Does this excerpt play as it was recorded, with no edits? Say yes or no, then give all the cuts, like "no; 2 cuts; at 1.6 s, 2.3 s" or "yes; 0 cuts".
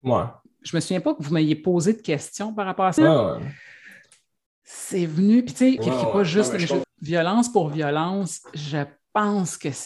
no; 3 cuts; at 3.0 s, 5.8 s, 6.8 s